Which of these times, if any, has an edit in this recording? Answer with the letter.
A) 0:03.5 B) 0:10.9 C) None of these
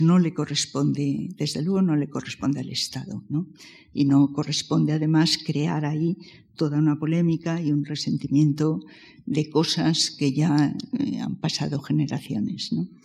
C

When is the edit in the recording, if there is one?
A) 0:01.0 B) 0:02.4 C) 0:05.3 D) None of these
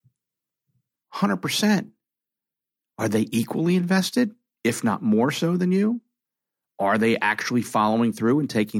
A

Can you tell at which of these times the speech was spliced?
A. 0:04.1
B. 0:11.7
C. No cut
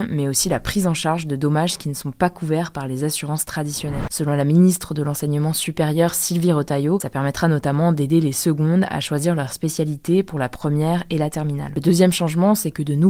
A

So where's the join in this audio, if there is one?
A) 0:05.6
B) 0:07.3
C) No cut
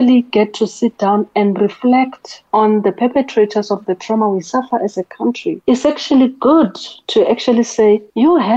C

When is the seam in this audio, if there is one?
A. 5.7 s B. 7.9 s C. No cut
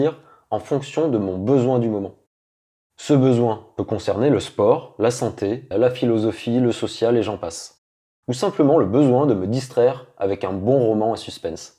A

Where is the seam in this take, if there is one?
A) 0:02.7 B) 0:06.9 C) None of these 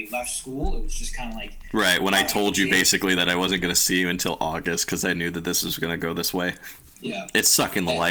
B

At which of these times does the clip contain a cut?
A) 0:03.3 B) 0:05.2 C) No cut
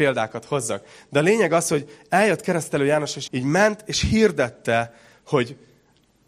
A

